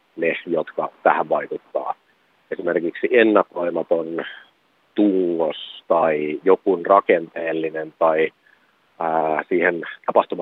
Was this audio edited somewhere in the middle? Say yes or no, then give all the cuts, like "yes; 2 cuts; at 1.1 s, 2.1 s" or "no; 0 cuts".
no; 0 cuts